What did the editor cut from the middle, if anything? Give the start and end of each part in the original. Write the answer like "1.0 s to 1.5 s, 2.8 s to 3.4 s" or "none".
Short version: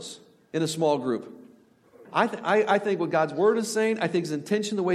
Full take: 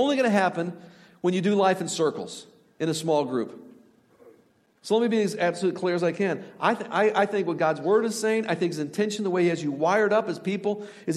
4.3 s to 6.5 s